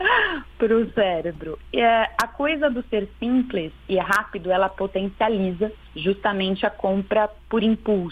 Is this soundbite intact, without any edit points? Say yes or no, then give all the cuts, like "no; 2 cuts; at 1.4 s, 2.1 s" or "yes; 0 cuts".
no; 1 cut; at 5.8 s